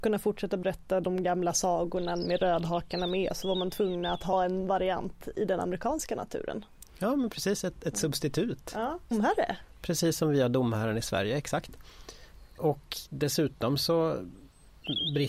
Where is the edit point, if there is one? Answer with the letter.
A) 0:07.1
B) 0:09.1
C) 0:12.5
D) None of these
B